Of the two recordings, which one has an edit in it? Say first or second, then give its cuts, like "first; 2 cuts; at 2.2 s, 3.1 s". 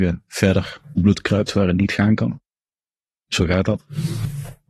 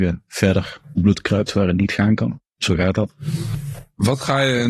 second; 1 cut; at 2.5 s